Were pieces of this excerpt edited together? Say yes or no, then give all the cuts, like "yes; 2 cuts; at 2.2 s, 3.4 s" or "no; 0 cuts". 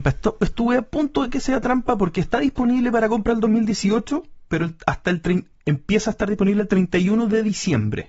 no; 0 cuts